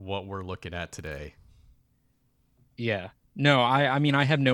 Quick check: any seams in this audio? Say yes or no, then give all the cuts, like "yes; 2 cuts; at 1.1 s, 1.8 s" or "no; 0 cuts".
no; 0 cuts